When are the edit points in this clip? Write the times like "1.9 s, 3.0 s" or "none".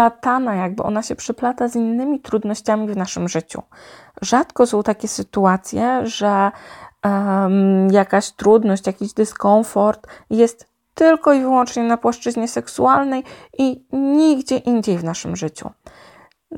none